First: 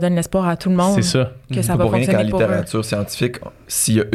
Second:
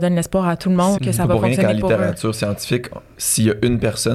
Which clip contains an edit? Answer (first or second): second